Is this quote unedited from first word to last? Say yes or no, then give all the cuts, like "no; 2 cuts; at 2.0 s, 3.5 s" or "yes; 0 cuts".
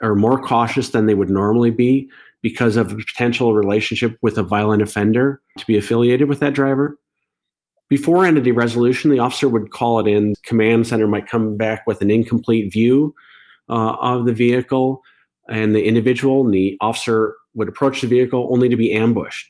no; 2 cuts; at 5.6 s, 10.3 s